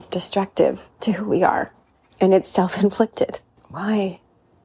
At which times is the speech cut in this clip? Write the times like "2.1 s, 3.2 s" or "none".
3.6 s